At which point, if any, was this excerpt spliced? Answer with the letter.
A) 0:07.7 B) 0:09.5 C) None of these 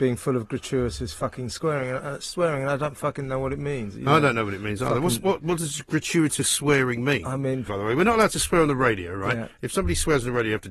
A